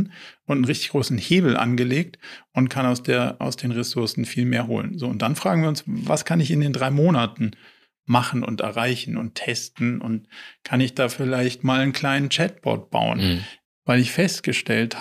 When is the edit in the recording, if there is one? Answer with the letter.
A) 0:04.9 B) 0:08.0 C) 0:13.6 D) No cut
C